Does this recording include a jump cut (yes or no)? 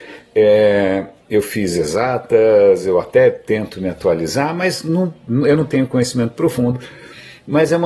no